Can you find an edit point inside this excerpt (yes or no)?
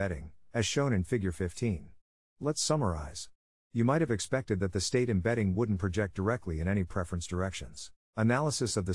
yes